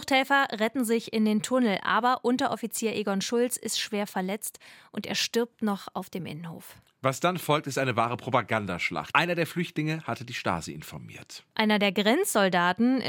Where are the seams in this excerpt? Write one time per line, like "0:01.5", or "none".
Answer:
0:09.1
0:11.5